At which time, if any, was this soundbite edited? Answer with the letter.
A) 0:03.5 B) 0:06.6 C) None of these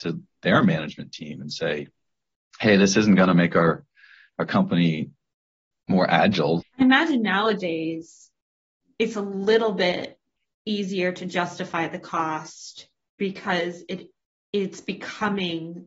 B